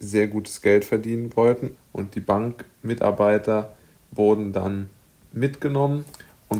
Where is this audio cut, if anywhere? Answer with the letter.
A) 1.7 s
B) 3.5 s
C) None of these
A